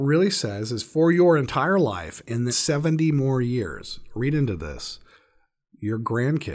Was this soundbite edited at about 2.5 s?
yes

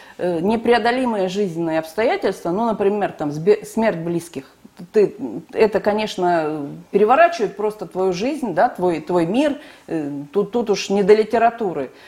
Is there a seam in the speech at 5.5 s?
yes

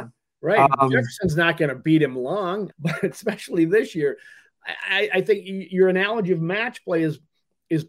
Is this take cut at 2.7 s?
yes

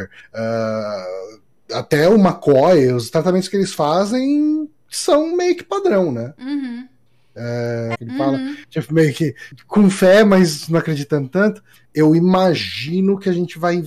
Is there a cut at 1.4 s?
no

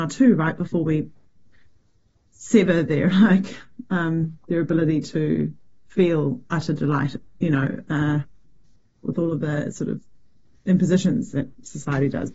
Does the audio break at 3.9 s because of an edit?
no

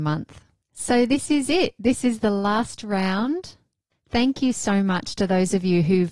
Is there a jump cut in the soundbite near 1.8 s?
no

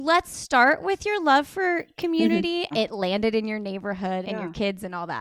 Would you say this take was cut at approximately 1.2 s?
no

